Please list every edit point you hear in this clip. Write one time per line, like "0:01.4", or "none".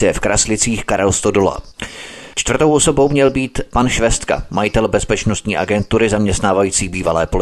0:02.3

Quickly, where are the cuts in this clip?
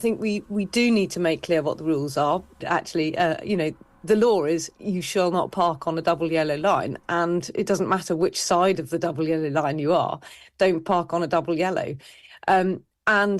0:02.6

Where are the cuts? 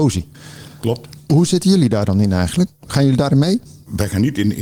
none

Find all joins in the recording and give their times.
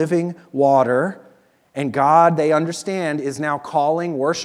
none

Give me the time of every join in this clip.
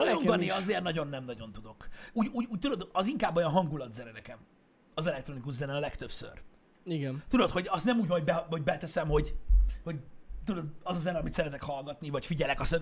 none

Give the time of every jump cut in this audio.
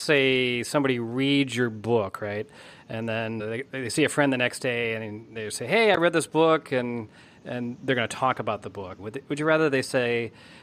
0:03.4
0:09.0

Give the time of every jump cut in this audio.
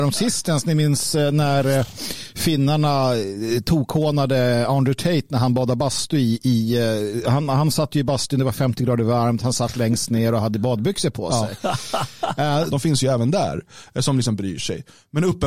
0:12.7

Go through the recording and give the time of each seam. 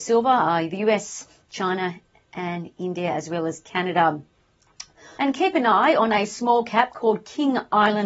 0:05.2

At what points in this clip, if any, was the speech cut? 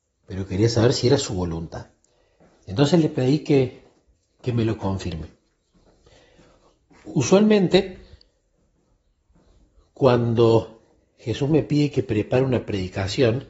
none

